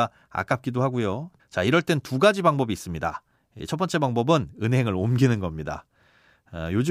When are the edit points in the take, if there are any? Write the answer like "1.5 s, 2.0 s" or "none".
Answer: 1.4 s